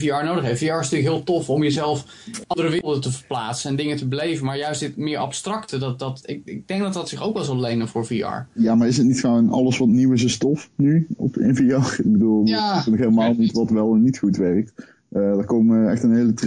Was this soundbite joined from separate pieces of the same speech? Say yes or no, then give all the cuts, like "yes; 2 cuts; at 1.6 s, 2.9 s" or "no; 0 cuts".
yes; 2 cuts; at 2.4 s, 6.2 s